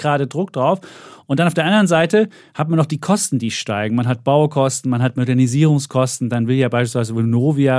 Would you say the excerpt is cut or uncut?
uncut